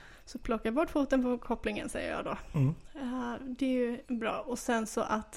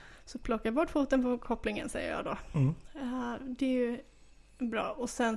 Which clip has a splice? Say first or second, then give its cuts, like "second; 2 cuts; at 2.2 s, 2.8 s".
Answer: first; 1 cut; at 4.0 s